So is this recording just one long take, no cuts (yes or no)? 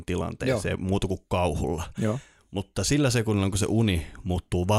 yes